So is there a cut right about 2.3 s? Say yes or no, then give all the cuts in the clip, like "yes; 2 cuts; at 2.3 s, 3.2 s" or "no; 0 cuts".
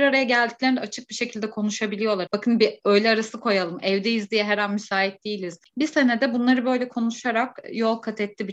yes; 2 cuts; at 2.3 s, 5.7 s